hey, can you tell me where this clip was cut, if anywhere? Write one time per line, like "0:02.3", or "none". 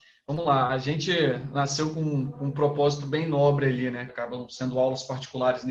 0:04.1